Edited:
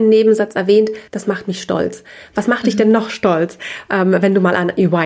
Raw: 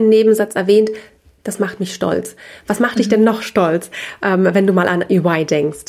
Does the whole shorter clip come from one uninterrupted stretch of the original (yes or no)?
no